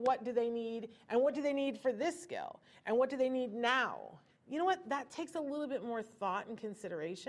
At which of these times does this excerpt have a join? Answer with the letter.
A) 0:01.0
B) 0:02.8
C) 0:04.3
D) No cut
C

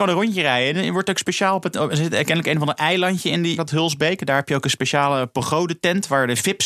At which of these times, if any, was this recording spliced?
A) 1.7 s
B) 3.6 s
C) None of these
B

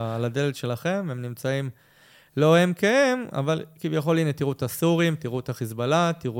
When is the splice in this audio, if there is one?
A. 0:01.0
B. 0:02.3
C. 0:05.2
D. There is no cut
D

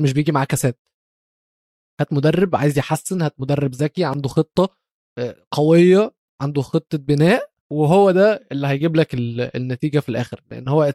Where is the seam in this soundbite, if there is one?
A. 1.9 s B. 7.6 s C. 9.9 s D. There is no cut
B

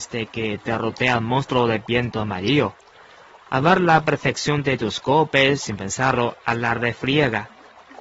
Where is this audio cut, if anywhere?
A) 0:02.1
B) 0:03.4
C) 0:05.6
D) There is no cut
C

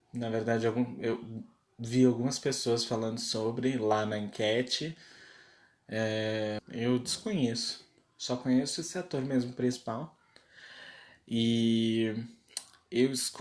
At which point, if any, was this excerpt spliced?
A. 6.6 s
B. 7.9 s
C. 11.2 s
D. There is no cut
A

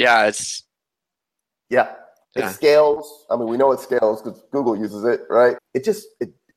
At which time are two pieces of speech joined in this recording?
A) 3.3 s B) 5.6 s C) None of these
B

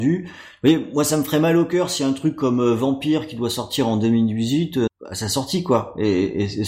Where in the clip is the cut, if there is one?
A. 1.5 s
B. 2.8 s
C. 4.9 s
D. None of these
C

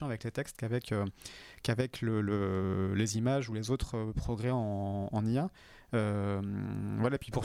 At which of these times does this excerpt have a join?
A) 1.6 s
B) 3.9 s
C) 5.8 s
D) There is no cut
D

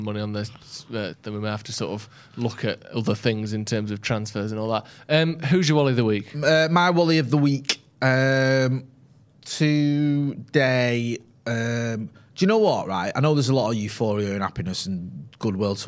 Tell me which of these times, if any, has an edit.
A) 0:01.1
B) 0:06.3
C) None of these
A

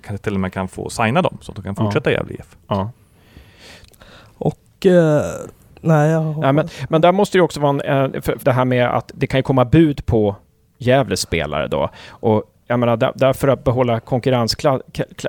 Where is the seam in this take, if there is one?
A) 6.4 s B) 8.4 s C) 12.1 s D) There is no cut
B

